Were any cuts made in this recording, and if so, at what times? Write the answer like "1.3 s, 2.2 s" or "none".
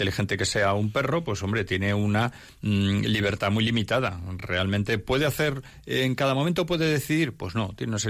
none